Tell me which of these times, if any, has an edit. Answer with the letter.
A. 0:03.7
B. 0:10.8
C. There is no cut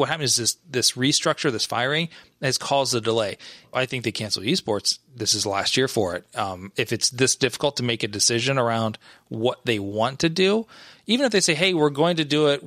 A